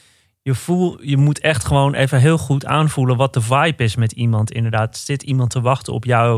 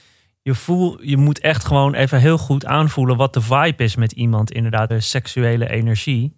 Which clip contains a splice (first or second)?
second